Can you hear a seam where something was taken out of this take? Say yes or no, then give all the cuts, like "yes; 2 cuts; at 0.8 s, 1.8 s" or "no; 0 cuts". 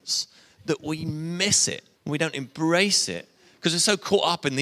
yes; 1 cut; at 2.0 s